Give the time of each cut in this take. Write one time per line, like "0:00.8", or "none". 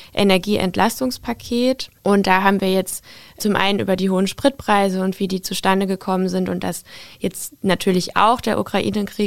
0:02.0